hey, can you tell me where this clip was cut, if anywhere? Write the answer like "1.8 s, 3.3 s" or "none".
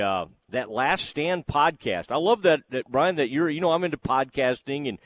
none